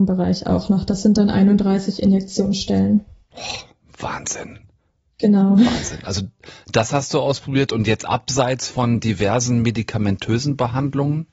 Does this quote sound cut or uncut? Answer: uncut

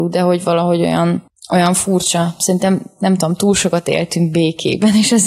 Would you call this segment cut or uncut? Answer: uncut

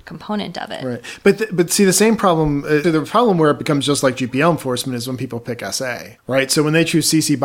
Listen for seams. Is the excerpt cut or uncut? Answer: cut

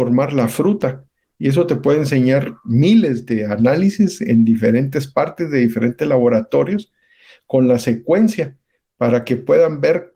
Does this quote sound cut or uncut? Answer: uncut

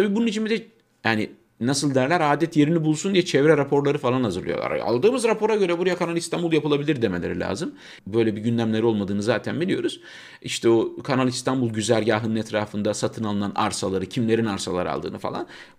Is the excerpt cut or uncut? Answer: cut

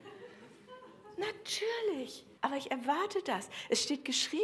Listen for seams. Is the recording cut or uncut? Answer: cut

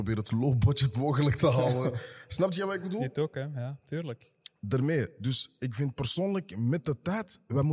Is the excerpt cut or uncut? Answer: uncut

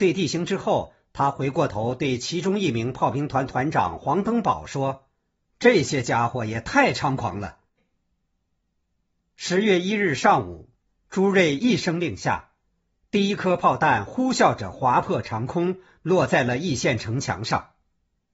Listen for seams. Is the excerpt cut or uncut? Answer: cut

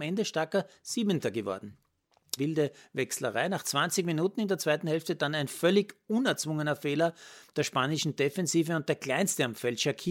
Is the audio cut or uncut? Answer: cut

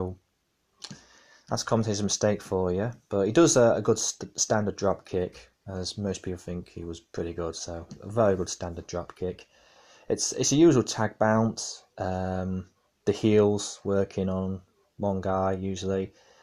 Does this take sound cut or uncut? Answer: uncut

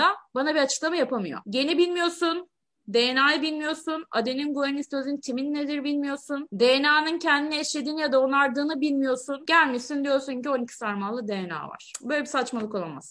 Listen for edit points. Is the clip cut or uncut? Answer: uncut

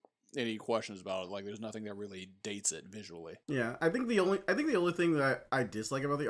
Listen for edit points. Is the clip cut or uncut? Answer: cut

